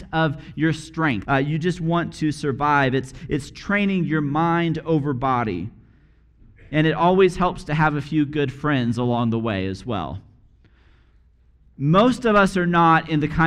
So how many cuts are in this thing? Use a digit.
1